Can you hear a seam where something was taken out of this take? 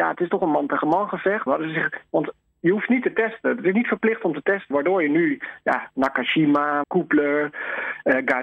yes; 3 cuts; at 1.5 s, 4.7 s, 6.8 s

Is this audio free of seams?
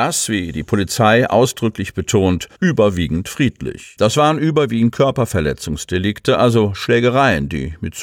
no; 2 cuts; at 2.5 s, 4.0 s

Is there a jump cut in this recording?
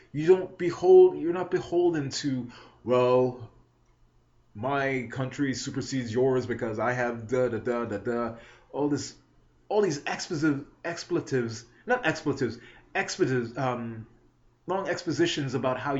no; 0 cuts

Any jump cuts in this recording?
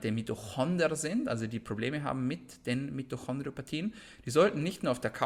no; 0 cuts

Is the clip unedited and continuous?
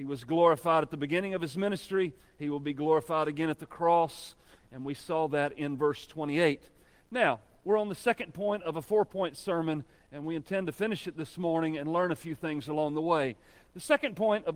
yes; 0 cuts

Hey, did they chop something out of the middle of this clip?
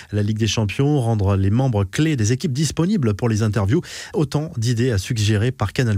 yes; 1 cut; at 4.1 s

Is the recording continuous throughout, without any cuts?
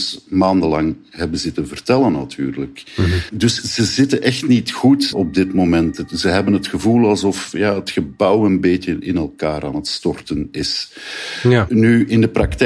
no; 1 cut; at 5.1 s

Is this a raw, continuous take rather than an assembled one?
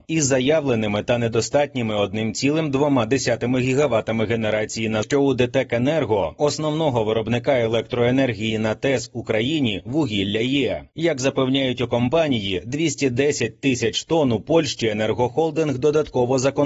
no; 1 cut; at 5.0 s

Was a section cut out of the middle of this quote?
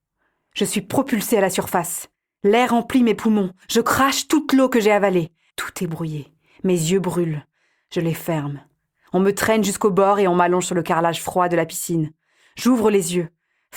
yes; 2 cuts; at 3.6 s, 5.5 s

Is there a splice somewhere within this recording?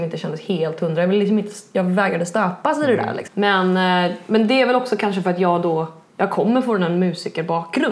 yes; 1 cut; at 3.3 s

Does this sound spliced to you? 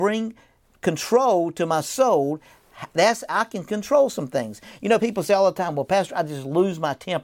no; 0 cuts

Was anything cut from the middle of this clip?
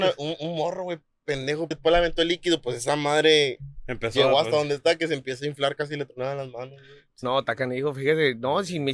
yes; 1 cut; at 1.7 s

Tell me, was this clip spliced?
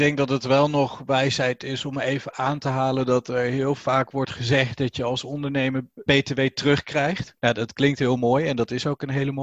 yes; 2 cuts; at 6.1 s, 7.4 s

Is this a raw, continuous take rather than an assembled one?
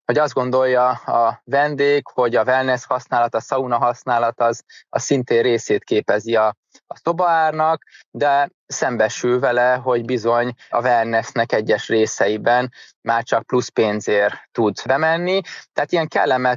yes; 0 cuts

